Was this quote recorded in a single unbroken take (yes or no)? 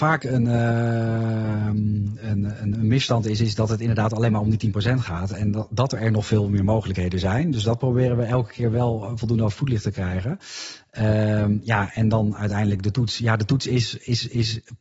yes